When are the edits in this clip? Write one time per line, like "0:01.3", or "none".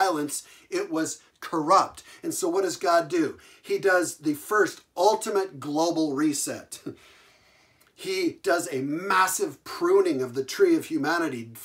none